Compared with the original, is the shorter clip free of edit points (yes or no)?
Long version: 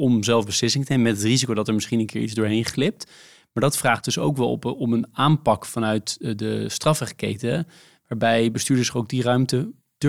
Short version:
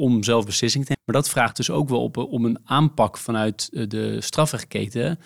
no